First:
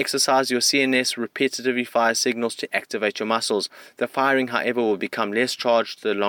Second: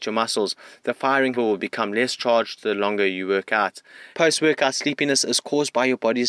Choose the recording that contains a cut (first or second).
second